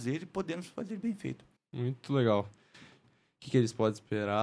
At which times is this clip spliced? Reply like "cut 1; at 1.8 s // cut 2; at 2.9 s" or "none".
cut 1; at 1.6 s // cut 2; at 3.0 s